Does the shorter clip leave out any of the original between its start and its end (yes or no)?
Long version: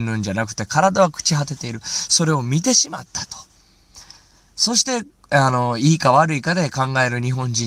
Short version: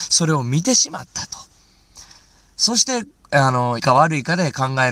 yes